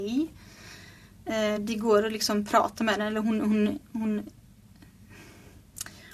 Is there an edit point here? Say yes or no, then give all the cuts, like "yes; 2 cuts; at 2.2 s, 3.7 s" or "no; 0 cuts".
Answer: no; 0 cuts